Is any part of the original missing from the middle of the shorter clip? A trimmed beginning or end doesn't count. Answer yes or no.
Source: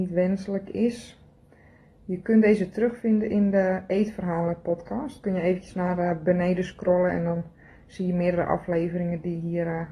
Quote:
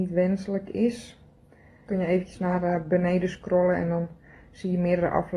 yes